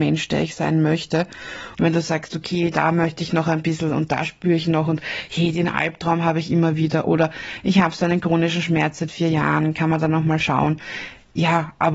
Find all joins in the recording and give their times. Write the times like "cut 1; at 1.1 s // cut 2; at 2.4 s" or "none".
cut 1; at 1.7 s